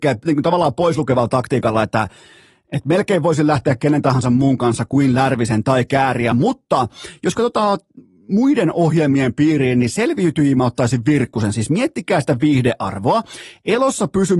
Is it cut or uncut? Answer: uncut